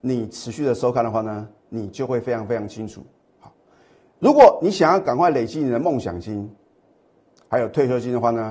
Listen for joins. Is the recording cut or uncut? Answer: uncut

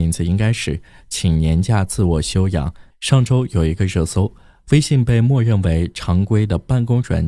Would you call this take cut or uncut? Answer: cut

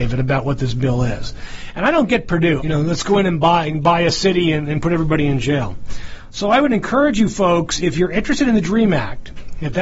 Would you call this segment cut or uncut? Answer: cut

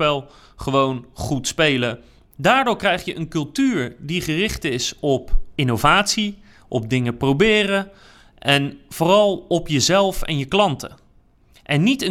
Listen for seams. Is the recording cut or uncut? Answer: cut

